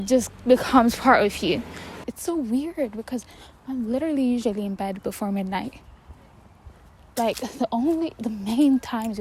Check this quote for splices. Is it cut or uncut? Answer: cut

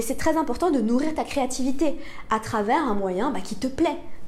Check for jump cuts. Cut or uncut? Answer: uncut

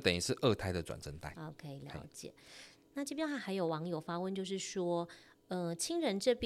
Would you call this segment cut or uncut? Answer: cut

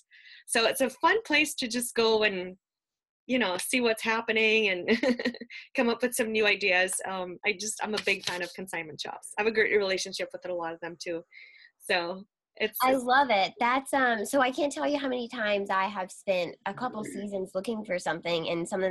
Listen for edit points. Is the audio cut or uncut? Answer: uncut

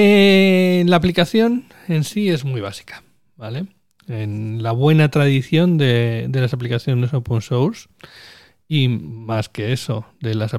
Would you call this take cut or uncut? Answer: uncut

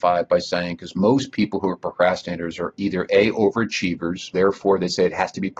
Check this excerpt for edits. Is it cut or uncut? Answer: cut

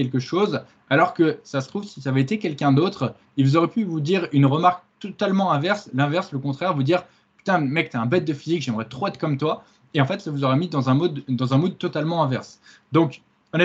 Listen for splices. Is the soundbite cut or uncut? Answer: uncut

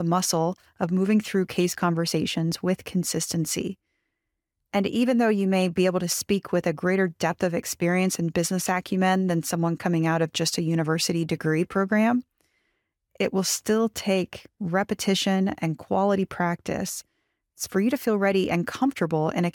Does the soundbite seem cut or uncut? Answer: uncut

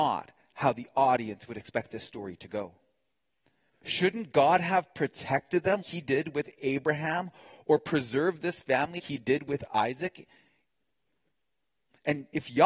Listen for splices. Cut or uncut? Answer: cut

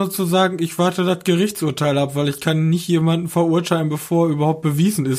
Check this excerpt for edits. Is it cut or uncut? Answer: uncut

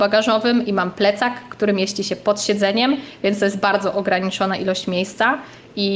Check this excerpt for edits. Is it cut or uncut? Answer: uncut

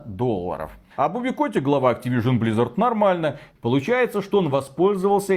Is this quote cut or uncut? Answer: cut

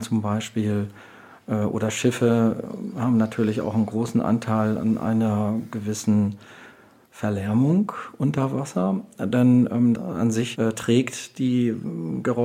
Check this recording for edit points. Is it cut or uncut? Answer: cut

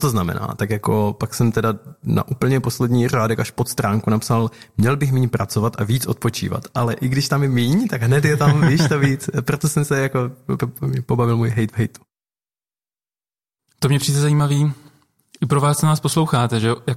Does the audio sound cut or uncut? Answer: cut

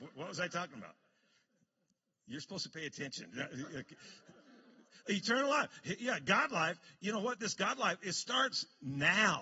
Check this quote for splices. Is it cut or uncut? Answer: uncut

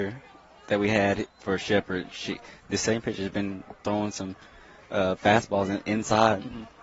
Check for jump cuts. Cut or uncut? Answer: uncut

